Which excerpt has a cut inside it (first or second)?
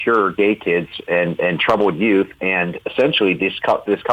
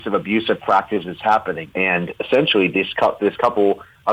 second